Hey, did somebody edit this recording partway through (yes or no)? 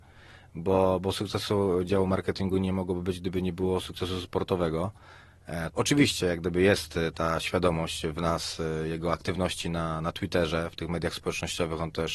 yes